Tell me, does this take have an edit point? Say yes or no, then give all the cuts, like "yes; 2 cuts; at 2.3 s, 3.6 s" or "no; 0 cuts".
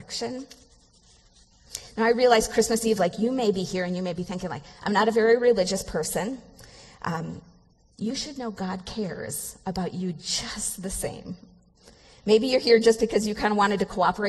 no; 0 cuts